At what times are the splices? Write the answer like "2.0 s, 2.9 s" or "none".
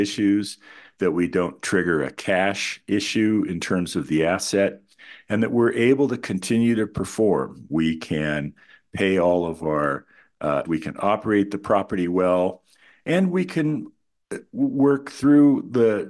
10.6 s